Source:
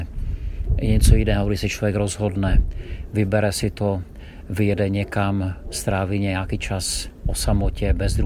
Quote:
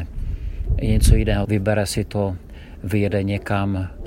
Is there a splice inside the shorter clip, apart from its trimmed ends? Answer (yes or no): yes